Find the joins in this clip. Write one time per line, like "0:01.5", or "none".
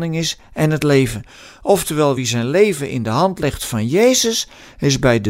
none